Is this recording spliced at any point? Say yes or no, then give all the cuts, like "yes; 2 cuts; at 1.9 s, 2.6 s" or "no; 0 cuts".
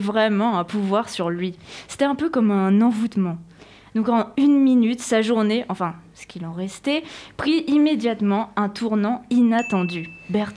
no; 0 cuts